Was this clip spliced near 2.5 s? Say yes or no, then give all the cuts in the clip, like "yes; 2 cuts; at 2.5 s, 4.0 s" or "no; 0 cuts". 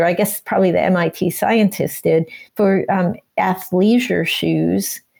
yes; 1 cut; at 2.5 s